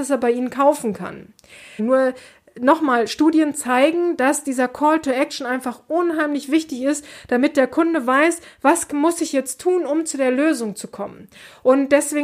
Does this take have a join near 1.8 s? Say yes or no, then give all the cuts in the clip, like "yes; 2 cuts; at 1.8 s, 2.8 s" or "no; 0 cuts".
yes; 1 cut; at 1.8 s